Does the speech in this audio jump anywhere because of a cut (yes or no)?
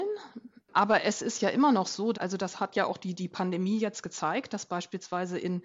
yes